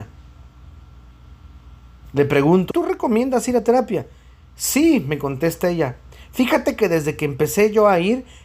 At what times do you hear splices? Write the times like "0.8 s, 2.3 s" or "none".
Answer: 2.7 s